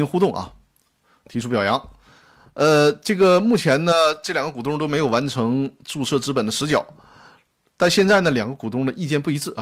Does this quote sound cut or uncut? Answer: uncut